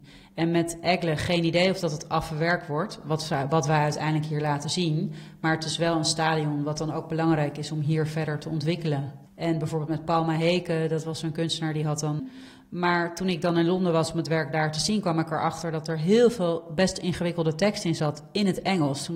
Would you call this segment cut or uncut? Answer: cut